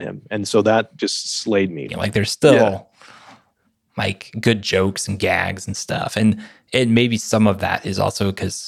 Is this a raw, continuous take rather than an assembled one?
no; 1 cut; at 1.9 s

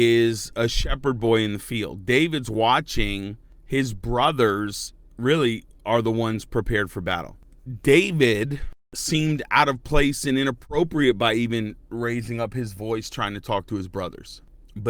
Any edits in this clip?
no; 0 cuts

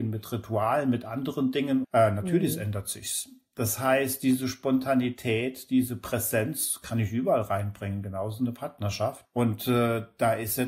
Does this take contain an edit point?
yes; 2 cuts; at 1.8 s, 9.2 s

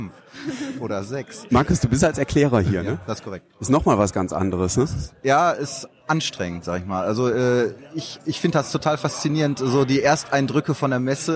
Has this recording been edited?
no; 0 cuts

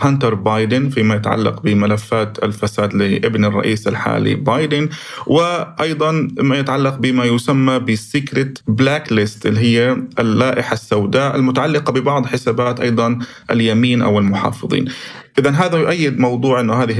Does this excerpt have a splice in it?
yes; 1 cut; at 8.6 s

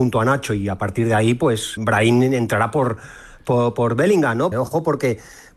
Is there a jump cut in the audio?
yes; 2 cuts; at 1.8 s, 4.5 s

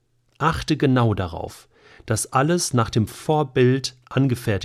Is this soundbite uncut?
yes; 0 cuts

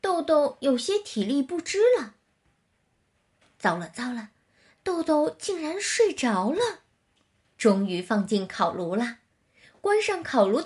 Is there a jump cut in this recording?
yes; 1 cut; at 7.5 s

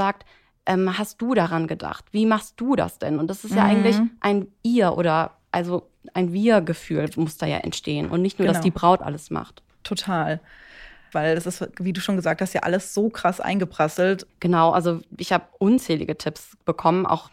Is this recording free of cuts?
no; 2 cuts; at 11.1 s, 14.3 s

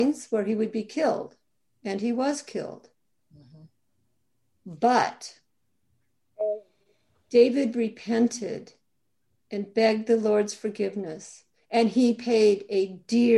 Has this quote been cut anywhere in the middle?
no; 0 cuts

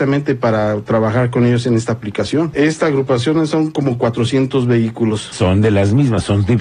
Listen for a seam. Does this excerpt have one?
yes; 2 cuts; at 2.5 s, 5.3 s

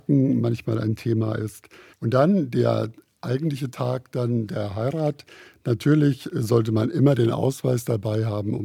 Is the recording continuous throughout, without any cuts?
no; 1 cut; at 1.9 s

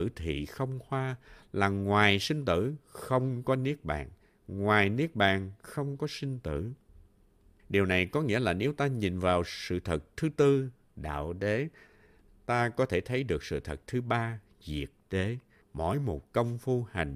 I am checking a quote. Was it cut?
yes; 2 cuts; at 7.6 s, 15.6 s

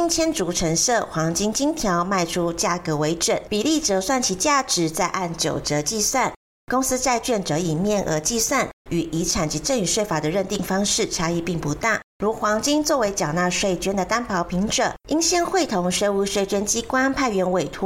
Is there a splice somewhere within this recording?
yes; 2 cuts; at 8.9 s, 12.1 s

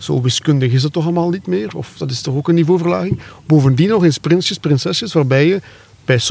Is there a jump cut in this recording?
no; 0 cuts

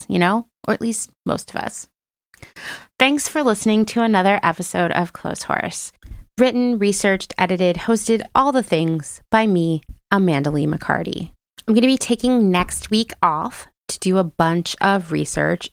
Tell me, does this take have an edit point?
no; 0 cuts

